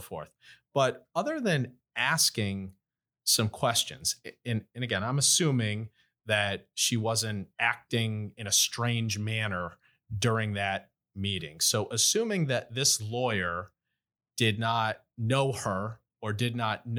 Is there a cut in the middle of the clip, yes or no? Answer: no